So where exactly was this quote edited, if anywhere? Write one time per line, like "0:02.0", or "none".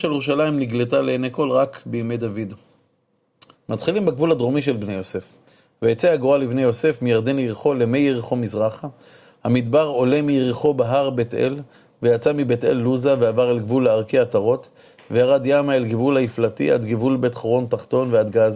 0:03.5